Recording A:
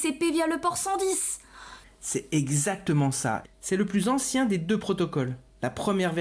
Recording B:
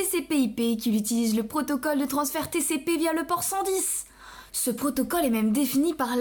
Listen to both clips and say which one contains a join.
A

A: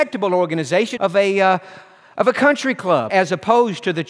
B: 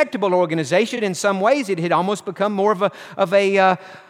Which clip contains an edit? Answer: A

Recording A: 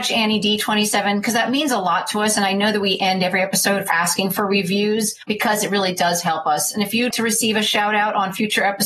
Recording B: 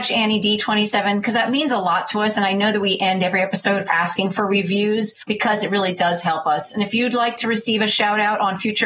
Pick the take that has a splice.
A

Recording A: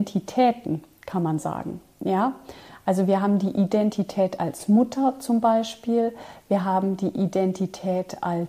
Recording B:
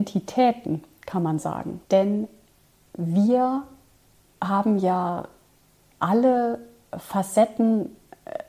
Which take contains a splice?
B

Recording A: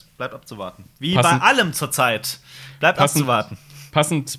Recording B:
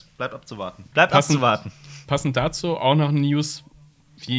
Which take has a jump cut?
B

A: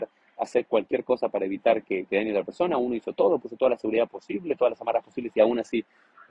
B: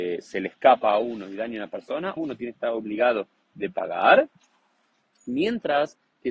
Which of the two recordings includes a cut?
B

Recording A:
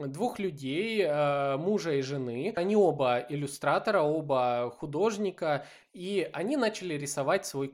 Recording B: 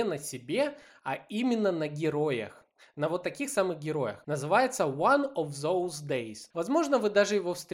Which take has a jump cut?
B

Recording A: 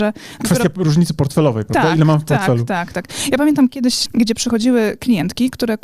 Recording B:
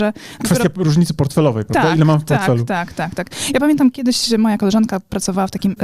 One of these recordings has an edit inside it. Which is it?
A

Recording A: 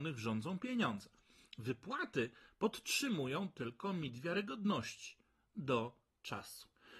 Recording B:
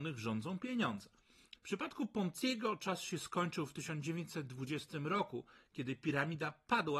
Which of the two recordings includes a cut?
B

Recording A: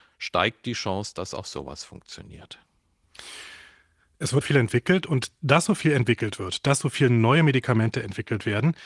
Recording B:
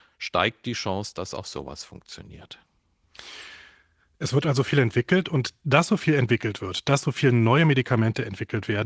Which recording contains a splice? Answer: A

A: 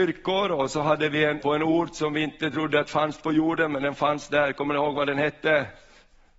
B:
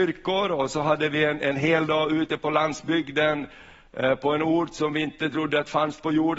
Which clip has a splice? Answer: A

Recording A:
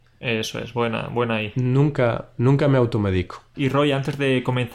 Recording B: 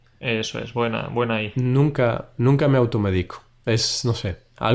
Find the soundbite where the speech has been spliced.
A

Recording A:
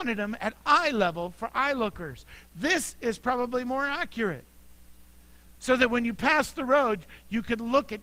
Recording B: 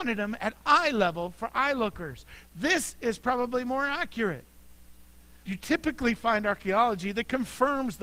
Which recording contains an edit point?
B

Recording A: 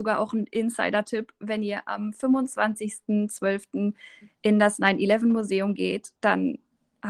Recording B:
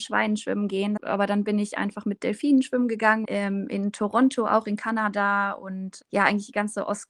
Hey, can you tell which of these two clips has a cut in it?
B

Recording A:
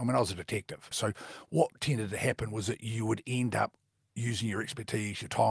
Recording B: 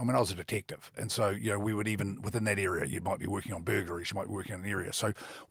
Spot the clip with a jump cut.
A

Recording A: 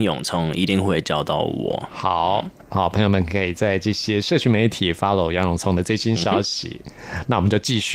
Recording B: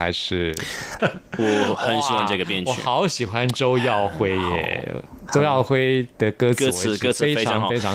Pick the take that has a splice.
B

